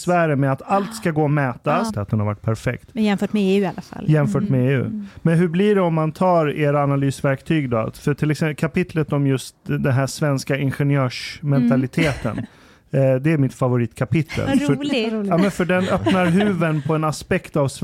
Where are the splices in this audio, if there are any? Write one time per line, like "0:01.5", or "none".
0:01.9

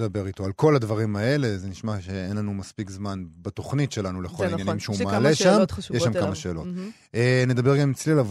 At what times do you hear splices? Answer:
none

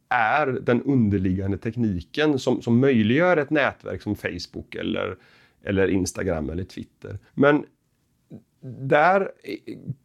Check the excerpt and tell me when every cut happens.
0:07.3

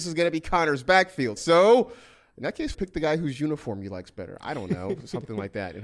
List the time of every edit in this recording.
0:01.4
0:02.7

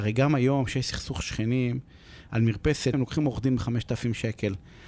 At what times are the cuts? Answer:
0:02.9

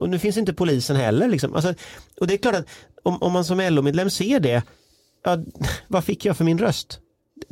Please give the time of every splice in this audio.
none

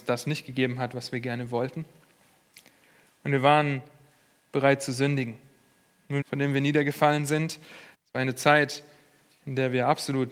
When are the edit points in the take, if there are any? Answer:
0:06.2
0:07.9

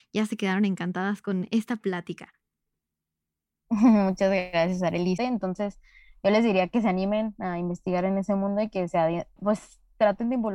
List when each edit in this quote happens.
0:05.2
0:09.4

